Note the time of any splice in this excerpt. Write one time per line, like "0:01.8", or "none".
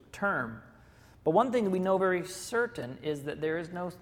none